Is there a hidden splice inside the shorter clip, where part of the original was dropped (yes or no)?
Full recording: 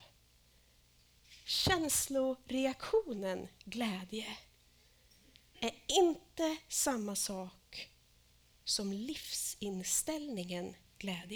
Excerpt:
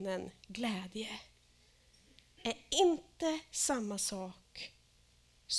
no